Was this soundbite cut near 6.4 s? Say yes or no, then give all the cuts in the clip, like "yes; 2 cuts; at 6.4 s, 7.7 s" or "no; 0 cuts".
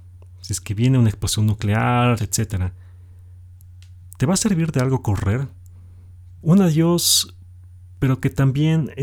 yes; 2 cuts; at 2.2 s, 6.4 s